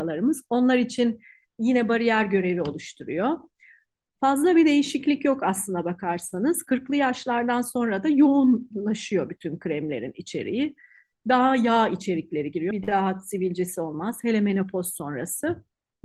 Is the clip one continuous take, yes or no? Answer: no